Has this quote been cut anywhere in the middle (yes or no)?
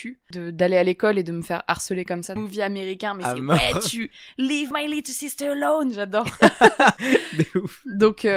yes